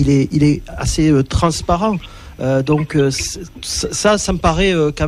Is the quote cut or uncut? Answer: uncut